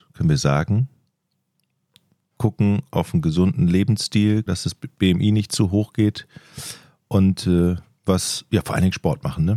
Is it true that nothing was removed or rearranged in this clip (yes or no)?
no